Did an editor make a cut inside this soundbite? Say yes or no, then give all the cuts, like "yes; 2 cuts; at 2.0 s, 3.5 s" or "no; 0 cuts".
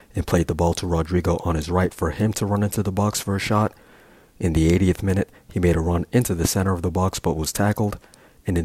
no; 0 cuts